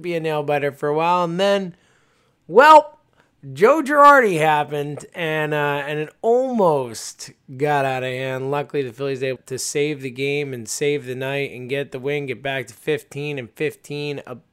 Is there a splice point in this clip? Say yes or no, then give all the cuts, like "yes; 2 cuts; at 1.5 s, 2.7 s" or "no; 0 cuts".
yes; 1 cut; at 9.4 s